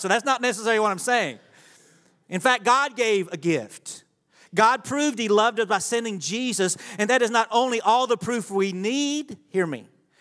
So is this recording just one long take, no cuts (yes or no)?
yes